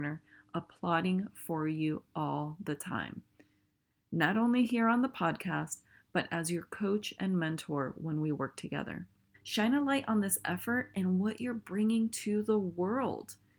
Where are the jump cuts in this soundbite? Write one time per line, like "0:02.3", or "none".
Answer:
0:09.3